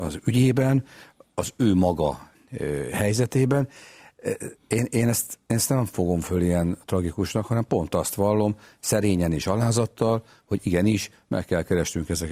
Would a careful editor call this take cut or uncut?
cut